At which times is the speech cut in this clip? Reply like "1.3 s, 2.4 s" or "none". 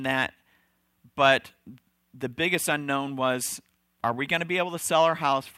none